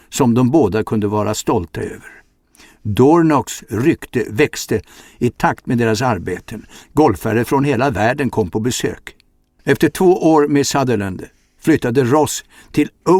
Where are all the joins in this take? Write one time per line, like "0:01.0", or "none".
0:09.6

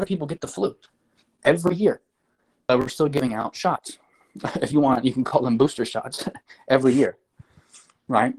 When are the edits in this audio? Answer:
none

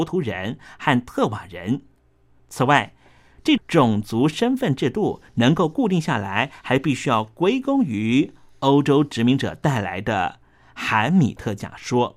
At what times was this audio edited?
0:02.4
0:03.6

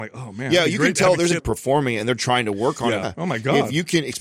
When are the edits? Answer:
0:01.4
0:03.0

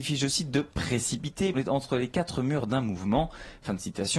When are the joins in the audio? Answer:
0:01.5

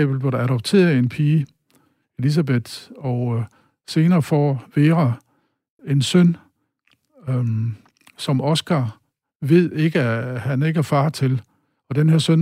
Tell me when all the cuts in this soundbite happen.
0:05.8

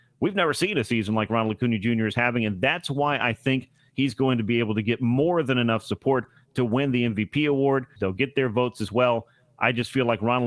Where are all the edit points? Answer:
0:08.0

